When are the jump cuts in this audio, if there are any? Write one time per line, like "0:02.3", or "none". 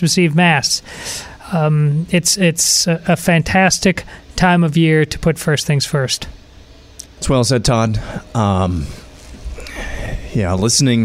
0:07.1